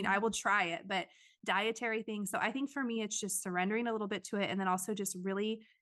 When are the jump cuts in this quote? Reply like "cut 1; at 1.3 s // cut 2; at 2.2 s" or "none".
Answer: none